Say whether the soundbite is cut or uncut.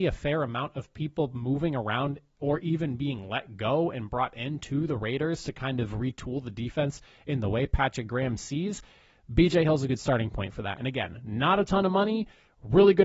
uncut